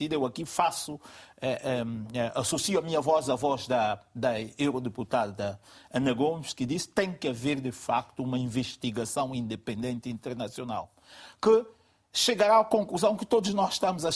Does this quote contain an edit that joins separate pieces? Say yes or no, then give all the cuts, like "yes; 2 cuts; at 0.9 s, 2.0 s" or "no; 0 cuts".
no; 0 cuts